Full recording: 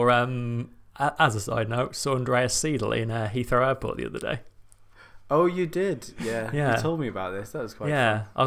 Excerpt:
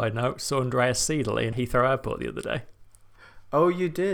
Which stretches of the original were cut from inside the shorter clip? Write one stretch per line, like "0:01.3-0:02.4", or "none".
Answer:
0:03.1-0:03.3